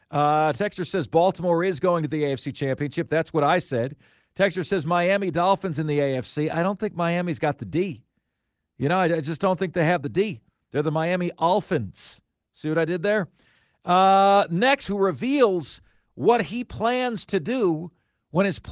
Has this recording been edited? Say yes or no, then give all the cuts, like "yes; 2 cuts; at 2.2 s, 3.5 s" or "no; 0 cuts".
yes; 1 cut; at 14.9 s